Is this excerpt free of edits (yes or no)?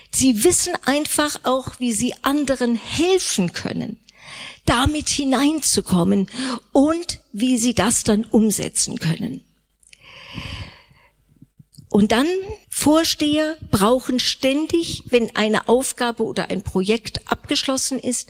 no